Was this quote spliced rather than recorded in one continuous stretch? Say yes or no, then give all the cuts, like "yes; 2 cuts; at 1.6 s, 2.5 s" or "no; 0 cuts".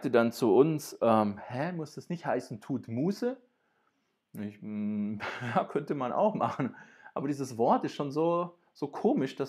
no; 0 cuts